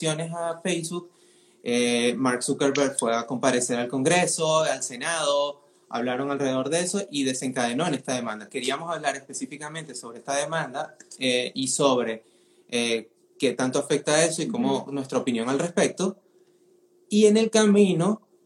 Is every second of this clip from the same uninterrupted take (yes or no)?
yes